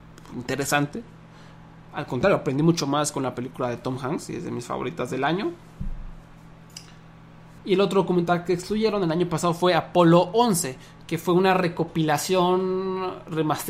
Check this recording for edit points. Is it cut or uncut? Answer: cut